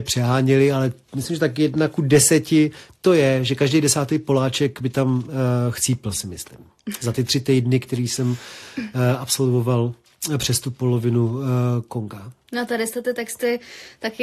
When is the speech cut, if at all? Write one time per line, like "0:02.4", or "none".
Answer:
none